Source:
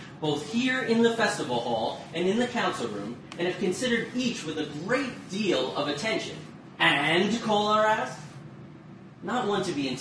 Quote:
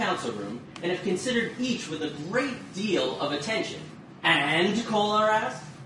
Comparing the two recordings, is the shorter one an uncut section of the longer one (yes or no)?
yes